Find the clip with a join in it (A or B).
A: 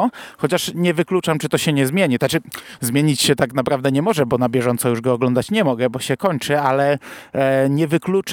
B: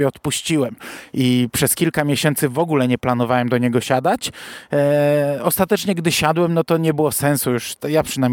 A